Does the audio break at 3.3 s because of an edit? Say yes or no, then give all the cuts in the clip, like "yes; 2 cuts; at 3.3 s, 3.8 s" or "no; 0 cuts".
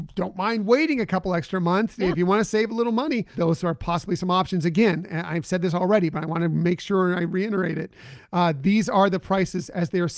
yes; 1 cut; at 3.3 s